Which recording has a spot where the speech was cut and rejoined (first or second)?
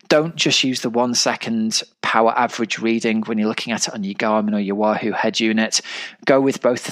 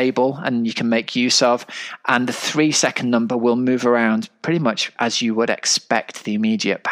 first